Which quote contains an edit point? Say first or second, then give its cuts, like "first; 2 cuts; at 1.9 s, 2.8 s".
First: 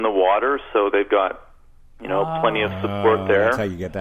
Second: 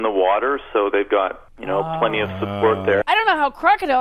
second; 2 cuts; at 1.5 s, 3.0 s